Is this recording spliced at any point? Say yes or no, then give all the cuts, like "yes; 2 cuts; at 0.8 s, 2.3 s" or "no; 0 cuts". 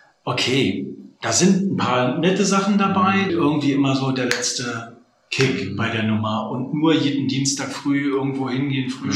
yes; 1 cut; at 3.3 s